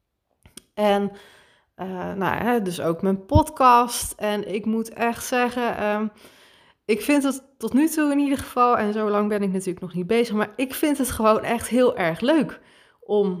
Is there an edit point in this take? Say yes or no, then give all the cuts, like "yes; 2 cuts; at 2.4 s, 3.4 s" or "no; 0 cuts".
no; 0 cuts